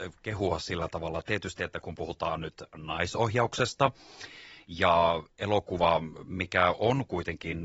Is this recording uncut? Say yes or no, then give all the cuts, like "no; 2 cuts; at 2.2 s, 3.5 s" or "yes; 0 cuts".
yes; 0 cuts